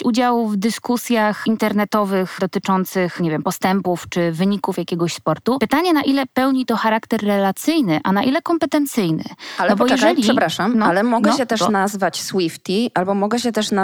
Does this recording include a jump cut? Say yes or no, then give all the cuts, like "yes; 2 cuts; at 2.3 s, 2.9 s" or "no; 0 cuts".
no; 0 cuts